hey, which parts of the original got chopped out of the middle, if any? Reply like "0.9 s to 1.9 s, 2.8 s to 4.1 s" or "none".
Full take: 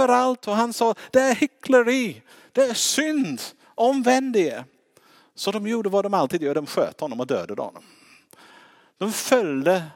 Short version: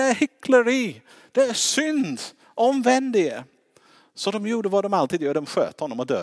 none